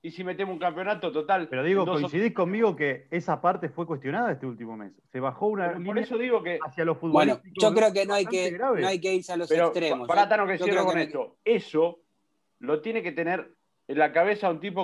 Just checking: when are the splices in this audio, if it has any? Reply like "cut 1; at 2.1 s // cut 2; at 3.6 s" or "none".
cut 1; at 11.3 s